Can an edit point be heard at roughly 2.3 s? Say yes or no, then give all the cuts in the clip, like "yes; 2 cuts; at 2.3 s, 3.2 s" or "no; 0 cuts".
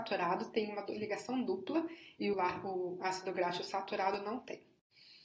yes; 1 cut; at 2.3 s